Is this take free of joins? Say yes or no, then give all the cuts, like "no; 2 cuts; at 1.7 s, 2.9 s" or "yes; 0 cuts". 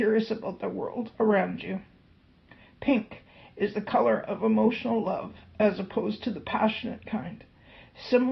yes; 0 cuts